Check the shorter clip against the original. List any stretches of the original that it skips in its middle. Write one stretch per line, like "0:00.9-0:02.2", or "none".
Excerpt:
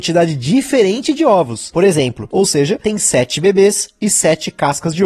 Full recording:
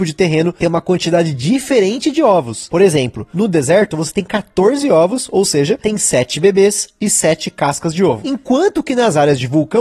0:03.3-0:05.3